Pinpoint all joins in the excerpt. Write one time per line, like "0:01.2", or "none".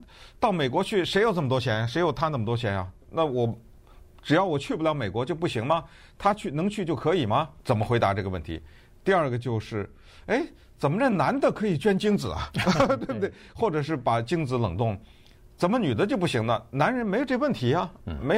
0:07.6

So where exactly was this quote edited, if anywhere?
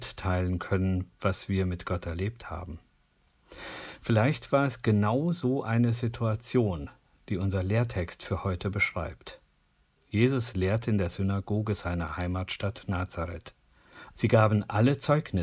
0:14.1

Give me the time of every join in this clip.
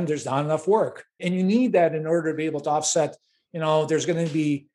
0:01.2

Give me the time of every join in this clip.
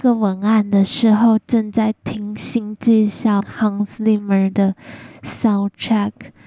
0:03.4

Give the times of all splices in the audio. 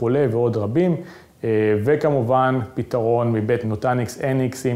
0:03.6

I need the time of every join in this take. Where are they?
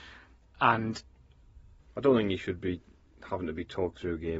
0:01.8

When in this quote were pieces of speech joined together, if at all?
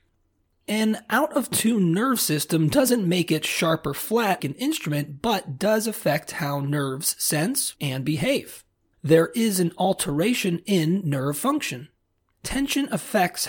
0:04.4
0:07.7

